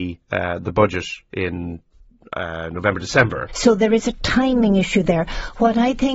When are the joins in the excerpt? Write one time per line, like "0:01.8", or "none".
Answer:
0:03.5